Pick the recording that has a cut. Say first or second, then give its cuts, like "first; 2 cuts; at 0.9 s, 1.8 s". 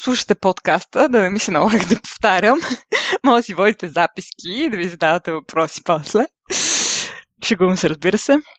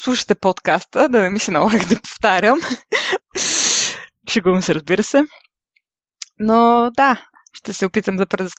second; 1 cut; at 3.2 s